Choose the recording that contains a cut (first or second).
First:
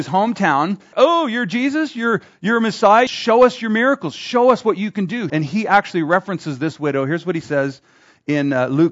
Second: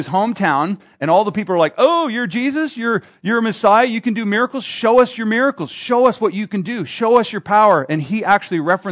first